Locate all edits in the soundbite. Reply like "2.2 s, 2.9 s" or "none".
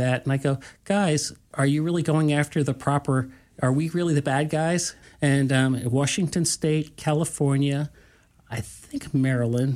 5.0 s